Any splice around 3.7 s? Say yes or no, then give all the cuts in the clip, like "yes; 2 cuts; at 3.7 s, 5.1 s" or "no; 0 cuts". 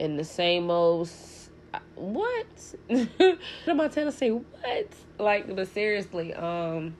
yes; 1 cut; at 3.7 s